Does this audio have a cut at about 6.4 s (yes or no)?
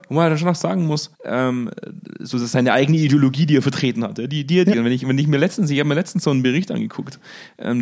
no